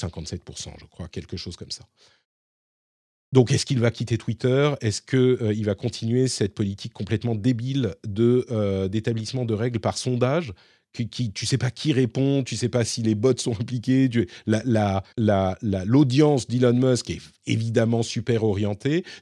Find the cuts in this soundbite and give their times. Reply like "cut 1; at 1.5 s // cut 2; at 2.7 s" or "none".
cut 1; at 15.1 s